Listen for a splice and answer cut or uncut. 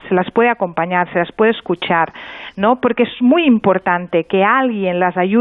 uncut